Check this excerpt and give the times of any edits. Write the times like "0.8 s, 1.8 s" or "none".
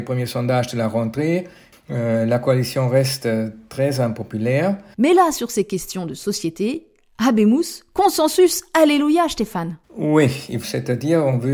4.9 s, 10.6 s